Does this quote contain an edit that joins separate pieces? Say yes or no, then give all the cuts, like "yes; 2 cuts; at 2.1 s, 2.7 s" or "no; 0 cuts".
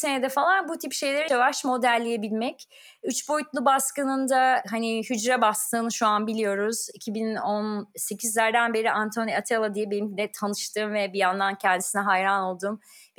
yes; 1 cut; at 1.3 s